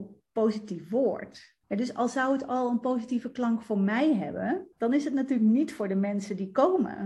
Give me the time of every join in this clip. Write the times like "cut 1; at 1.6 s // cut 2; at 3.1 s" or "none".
cut 1; at 1.6 s // cut 2; at 4.7 s